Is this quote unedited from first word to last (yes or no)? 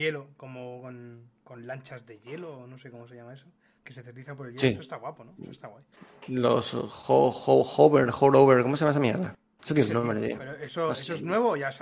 yes